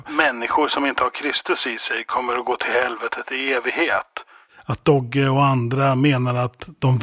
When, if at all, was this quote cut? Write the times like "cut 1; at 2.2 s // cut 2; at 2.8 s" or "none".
none

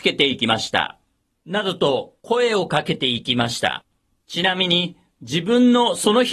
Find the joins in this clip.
cut 1; at 1.3 s // cut 2; at 4.3 s

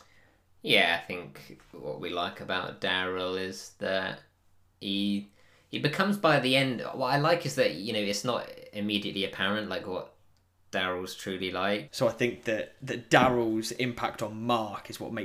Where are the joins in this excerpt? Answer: cut 1; at 11.9 s

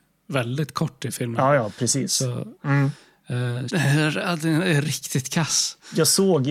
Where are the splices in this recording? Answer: cut 1; at 2.5 s // cut 2; at 3.7 s

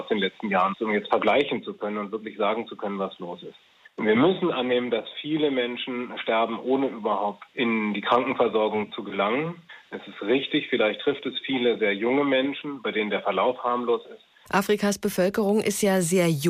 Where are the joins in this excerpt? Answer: cut 1; at 14.4 s

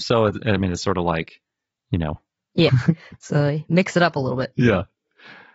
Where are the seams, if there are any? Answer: cut 1; at 2.7 s

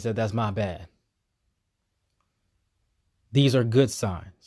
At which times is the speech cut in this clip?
none

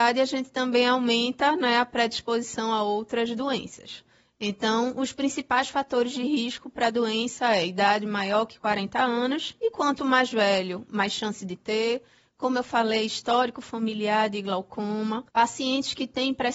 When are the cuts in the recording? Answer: cut 1; at 15.3 s

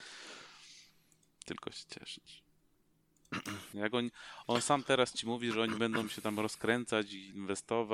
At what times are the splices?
cut 1; at 3.7 s

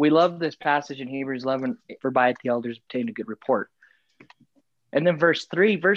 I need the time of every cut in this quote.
cut 1; at 2.0 s

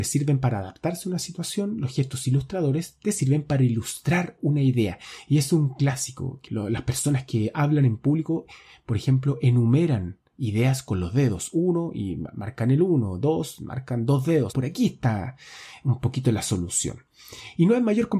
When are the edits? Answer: cut 1; at 6.5 s // cut 2; at 14.5 s

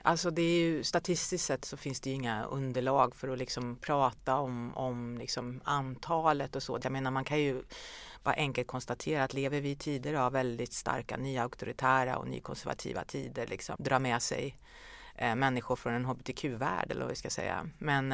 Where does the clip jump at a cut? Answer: cut 1; at 6.8 s // cut 2; at 13.8 s

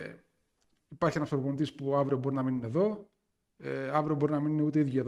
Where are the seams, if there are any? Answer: none

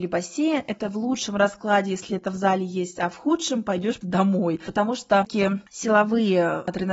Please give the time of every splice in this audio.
cut 1; at 4.0 s

